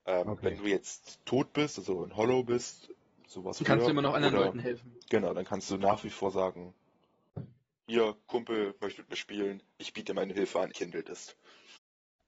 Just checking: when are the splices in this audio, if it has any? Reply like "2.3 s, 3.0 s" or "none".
10.7 s